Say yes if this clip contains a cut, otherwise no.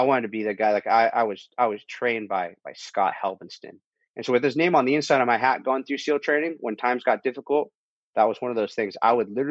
no